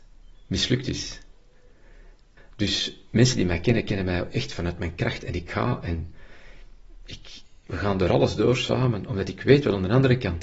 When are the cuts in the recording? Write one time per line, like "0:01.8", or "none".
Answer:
0:02.4